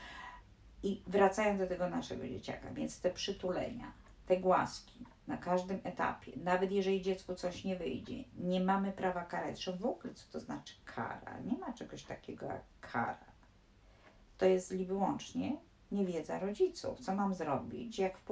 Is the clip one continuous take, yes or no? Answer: yes